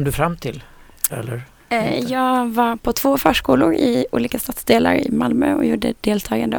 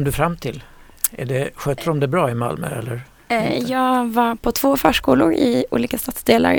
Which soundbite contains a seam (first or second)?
first